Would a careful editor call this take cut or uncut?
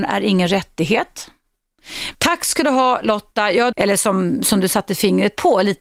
cut